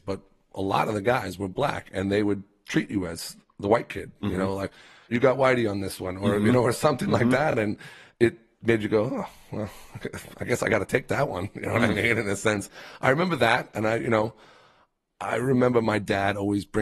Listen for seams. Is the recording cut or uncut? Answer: uncut